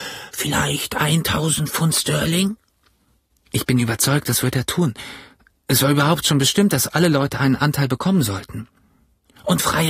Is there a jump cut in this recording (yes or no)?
no